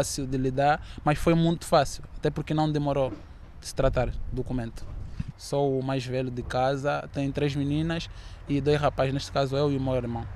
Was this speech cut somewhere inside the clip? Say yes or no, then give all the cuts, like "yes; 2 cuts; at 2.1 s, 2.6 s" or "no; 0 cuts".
yes; 2 cuts; at 5.3 s, 7.1 s